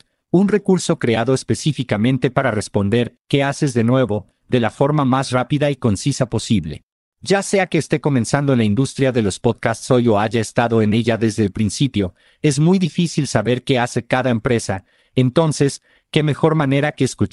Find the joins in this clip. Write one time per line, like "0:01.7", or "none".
none

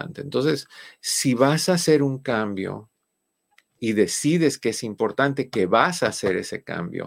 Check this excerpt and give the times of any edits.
none

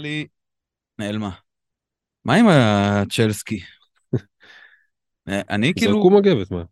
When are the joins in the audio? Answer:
0:02.2
0:05.1

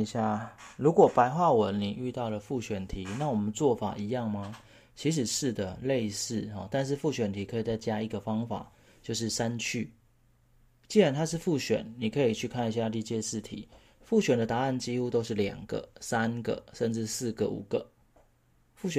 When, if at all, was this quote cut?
none

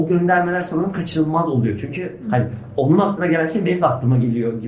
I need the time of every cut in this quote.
none

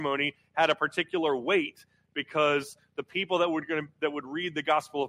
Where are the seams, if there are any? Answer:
none

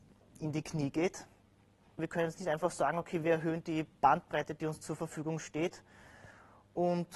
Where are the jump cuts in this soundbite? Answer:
0:02.0

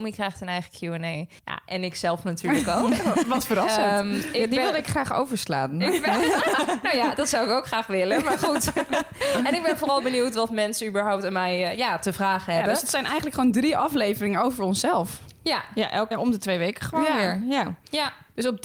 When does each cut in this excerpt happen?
0:01.4
0:16.1

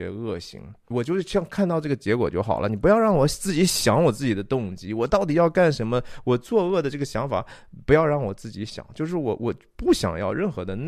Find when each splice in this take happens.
0:00.9

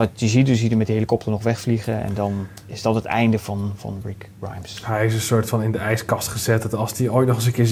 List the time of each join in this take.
none

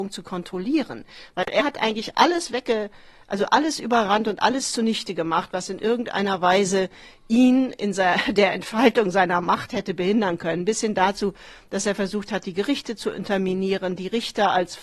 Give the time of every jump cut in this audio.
none

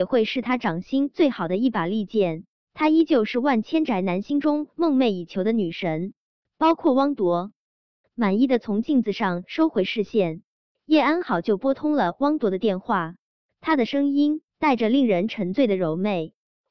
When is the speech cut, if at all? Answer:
0:02.7
0:14.5

